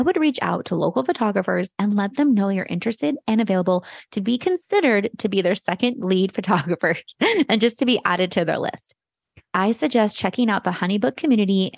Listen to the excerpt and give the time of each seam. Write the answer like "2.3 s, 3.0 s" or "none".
none